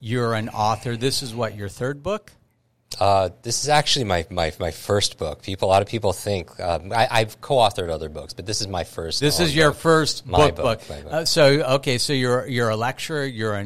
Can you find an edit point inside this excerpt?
no; 0 cuts

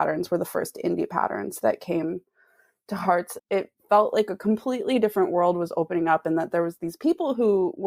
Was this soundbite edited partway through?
yes; 1 cut; at 3.4 s

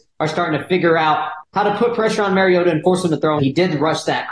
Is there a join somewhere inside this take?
yes; 1 cut; at 3.4 s

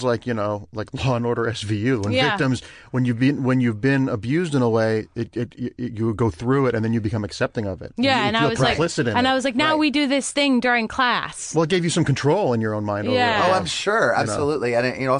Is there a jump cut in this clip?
no; 0 cuts

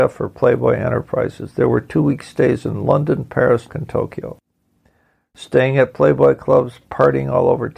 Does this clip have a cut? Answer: yes; 1 cut; at 3.7 s

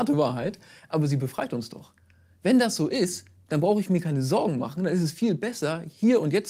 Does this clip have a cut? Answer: no; 0 cuts

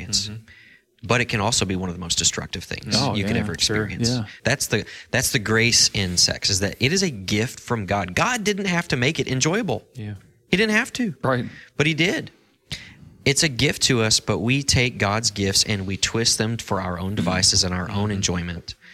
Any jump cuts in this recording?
yes; 1 cut; at 4.4 s

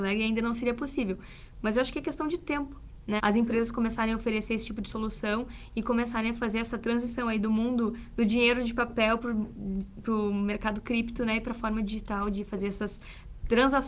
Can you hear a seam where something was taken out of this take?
yes; 1 cut; at 3.2 s

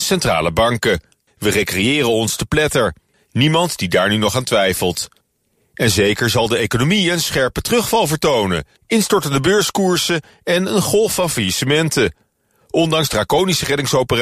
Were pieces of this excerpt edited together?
yes; 3 cuts; at 1.3 s, 3.1 s, 8.8 s

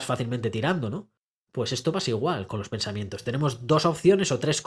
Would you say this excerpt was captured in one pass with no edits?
yes; 0 cuts

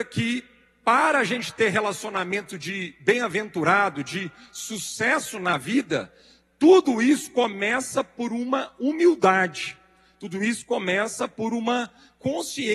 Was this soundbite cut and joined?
no; 0 cuts

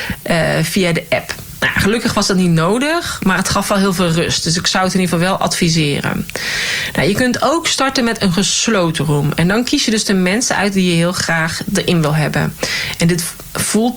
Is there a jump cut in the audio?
no; 0 cuts

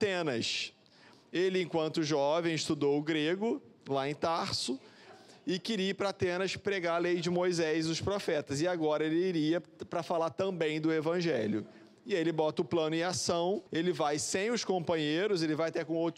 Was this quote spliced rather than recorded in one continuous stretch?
yes; 1 cut; at 13.7 s

